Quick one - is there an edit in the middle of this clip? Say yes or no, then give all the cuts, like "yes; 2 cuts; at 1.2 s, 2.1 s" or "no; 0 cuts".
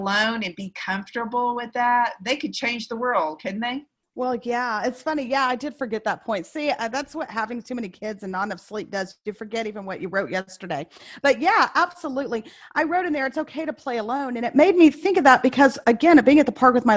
no; 0 cuts